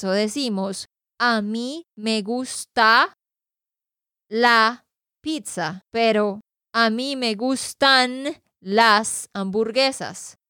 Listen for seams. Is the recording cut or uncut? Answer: cut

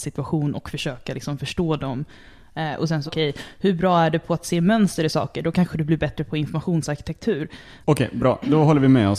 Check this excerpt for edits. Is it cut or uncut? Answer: cut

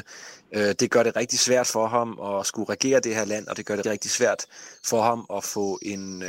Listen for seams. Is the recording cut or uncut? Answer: cut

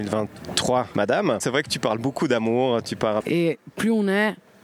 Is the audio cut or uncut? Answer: cut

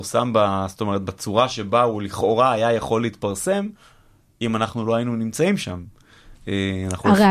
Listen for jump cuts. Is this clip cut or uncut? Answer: uncut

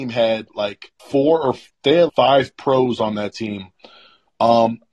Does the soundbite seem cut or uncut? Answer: cut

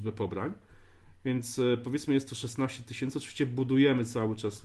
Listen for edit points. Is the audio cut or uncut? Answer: uncut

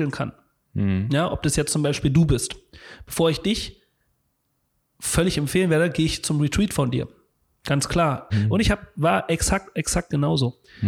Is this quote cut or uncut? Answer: cut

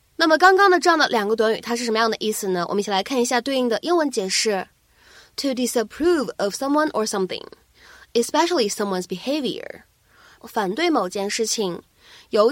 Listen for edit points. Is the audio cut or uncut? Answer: cut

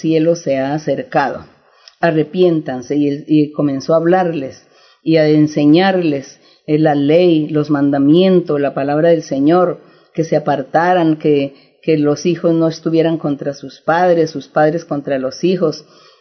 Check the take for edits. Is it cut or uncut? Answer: uncut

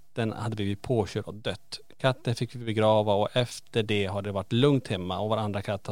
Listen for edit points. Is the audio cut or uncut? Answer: uncut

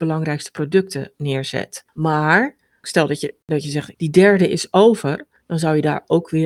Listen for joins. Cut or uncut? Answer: cut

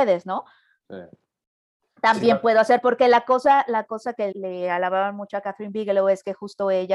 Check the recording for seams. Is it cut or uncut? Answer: cut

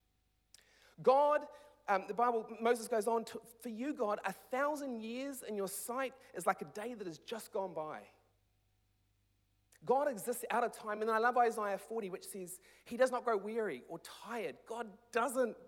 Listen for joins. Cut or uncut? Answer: uncut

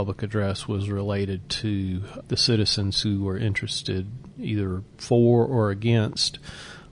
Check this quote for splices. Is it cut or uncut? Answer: cut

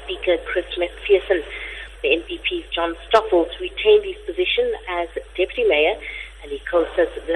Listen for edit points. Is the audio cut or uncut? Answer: cut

